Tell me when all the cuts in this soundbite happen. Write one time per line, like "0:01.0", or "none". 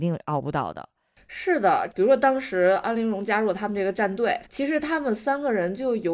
0:01.9
0:04.4

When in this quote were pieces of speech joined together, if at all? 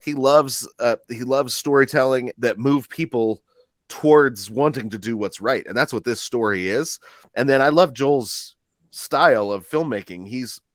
0:02.3
0:07.3

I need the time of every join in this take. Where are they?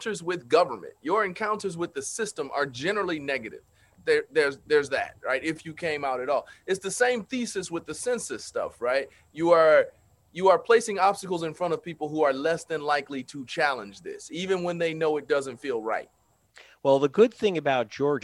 0:04.0

